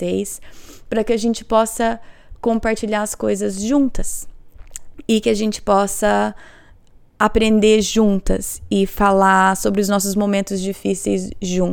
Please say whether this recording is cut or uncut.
uncut